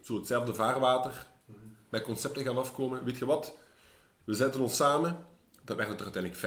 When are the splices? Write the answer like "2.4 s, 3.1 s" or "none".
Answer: none